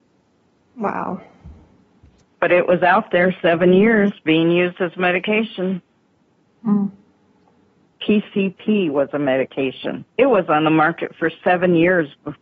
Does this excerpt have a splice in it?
yes; 3 cuts; at 2.2 s, 7.9 s, 10.1 s

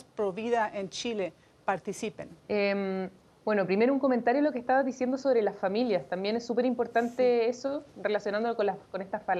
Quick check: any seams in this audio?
yes; 1 cut; at 2.4 s

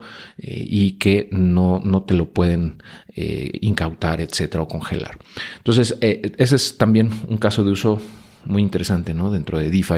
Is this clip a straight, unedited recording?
yes; 0 cuts

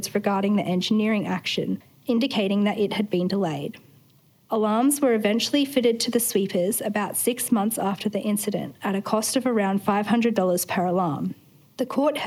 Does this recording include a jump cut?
no; 0 cuts

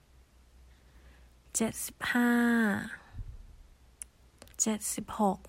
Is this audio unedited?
no; 1 cut; at 4.5 s

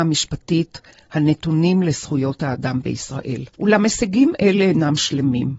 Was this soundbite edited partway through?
yes; 1 cut; at 3.5 s

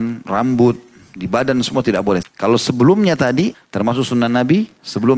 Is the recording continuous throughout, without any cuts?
no; 2 cuts; at 2.2 s, 3.5 s

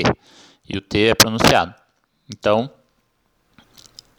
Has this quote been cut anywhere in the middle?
no; 0 cuts

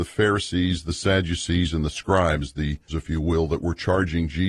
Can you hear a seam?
yes; 1 cut; at 2.9 s

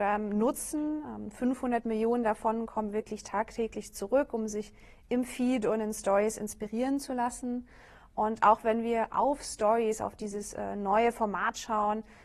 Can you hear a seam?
no; 0 cuts

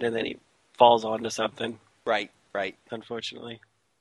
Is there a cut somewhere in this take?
yes; 1 cut; at 2.9 s

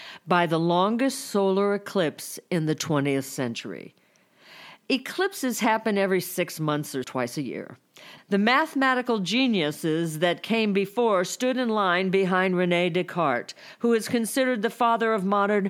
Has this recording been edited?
yes; 2 cuts; at 7.0 s, 8.2 s

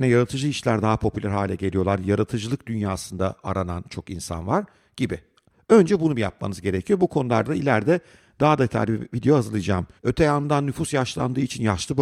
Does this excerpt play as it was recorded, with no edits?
no; 1 cut; at 10.0 s

